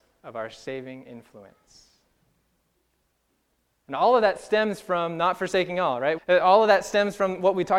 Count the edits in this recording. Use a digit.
1